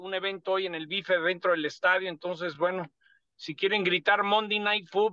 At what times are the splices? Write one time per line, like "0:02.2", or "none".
none